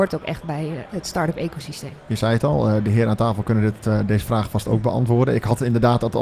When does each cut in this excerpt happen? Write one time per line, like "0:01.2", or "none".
none